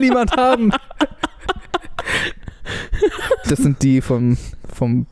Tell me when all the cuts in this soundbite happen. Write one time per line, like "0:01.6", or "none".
0:03.4

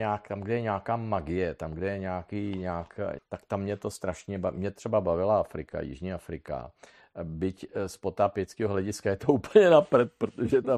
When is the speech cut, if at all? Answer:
0:03.2

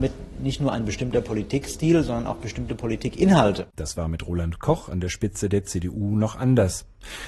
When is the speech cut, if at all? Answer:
0:03.7

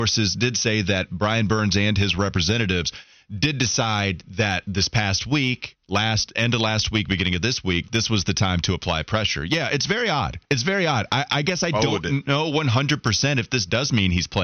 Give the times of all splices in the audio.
0:10.5

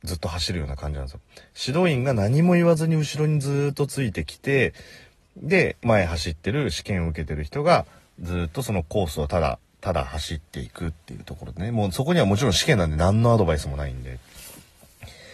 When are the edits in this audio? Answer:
0:05.8

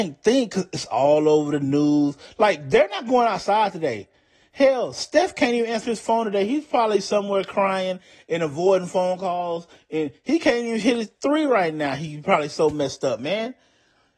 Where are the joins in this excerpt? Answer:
none

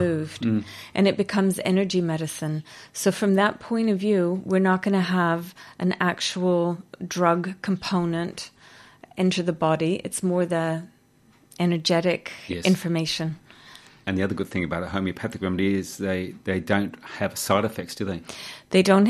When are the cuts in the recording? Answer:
none

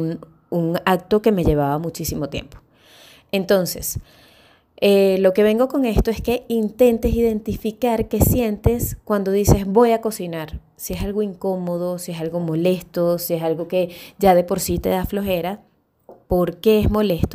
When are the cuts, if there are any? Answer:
0:16.3

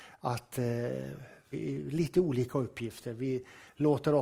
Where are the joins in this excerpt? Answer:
0:01.5

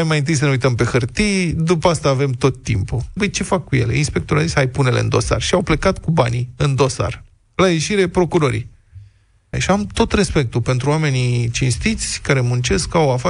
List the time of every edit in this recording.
0:03.2
0:09.5

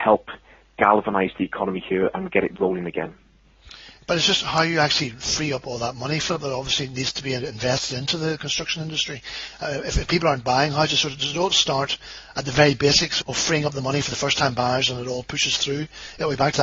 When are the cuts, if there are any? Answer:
0:11.5
0:13.2

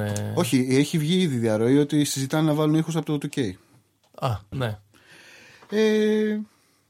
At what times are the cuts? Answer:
0:04.5

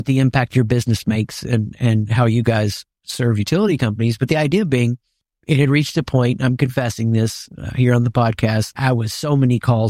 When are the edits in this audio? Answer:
0:08.7

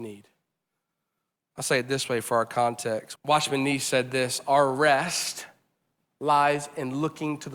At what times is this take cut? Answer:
0:03.2

